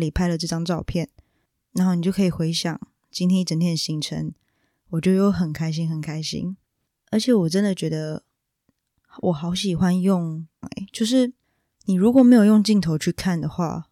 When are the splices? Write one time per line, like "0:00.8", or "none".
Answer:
0:10.6